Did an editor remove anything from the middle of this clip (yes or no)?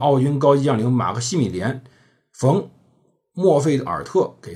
no